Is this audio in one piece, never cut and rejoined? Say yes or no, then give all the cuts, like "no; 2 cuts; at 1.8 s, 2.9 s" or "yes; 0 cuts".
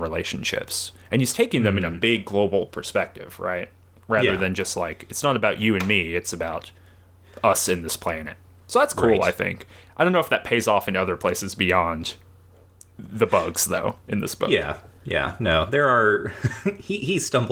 yes; 0 cuts